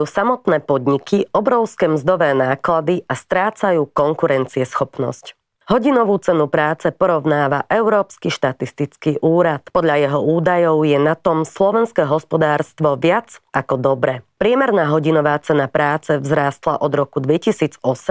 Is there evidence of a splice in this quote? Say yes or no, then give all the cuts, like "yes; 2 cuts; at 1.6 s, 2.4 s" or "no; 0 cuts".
no; 0 cuts